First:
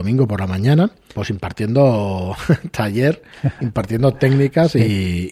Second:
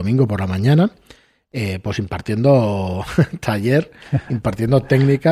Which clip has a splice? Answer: first; 1 cut; at 1.1 s

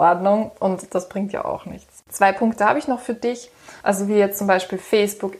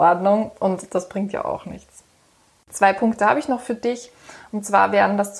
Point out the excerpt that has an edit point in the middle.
first; 2 cuts; at 2.0 s, 3.8 s

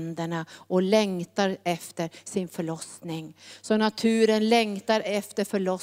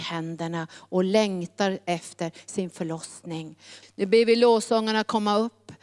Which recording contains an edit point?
second; 1 cut; at 3.8 s

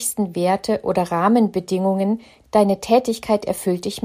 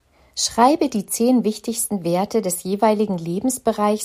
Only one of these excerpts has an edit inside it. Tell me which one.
first; 1 cut; at 2.4 s

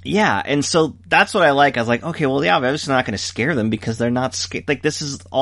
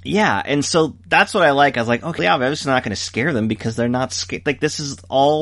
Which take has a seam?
second; 1 cut; at 2.2 s

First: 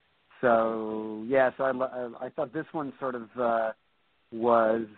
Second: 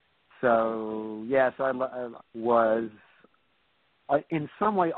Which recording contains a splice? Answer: second; 1 cut; at 2.2 s

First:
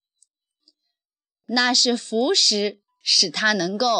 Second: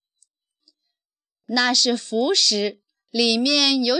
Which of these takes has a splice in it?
first; 1 cut; at 2.9 s

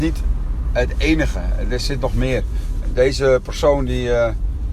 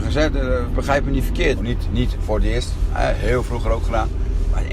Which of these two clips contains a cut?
second; 1 cut; at 1.6 s

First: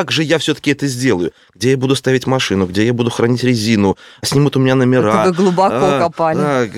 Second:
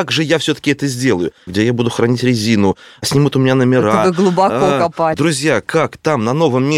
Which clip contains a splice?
second; 2 cuts; at 1.5 s, 5.1 s

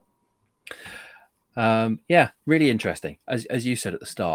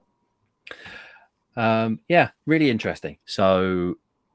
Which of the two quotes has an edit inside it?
second; 1 cut; at 3.2 s

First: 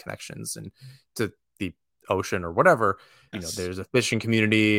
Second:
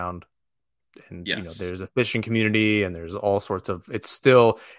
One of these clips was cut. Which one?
first; 1 cut; at 3.3 s

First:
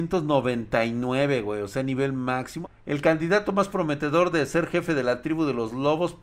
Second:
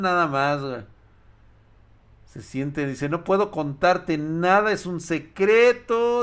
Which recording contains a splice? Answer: first; 1 cut; at 2.6 s

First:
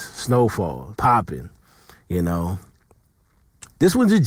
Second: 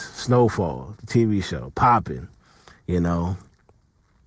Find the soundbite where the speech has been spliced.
first; 1 cut; at 1.0 s

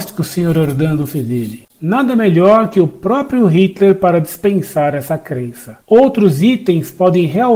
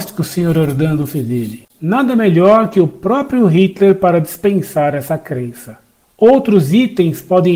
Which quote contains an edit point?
first; 1 cut; at 5.8 s

